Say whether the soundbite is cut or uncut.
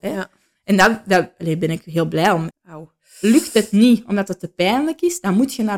cut